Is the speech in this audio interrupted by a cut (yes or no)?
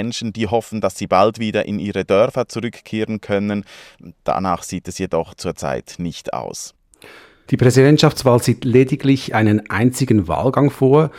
no